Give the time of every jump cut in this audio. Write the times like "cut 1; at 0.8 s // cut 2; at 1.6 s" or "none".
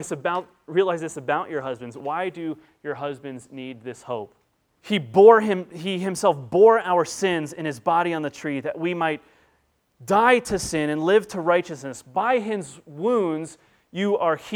cut 1; at 4.8 s